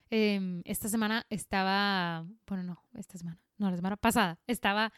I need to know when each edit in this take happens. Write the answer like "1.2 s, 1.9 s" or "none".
2.9 s